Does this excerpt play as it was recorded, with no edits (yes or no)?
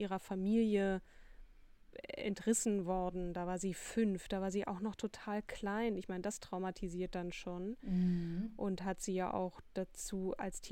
yes